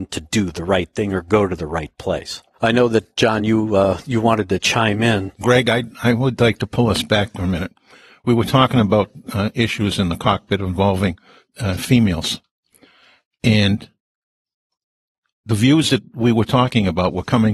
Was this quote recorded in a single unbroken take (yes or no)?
yes